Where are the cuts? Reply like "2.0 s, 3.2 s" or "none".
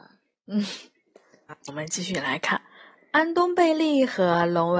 1.7 s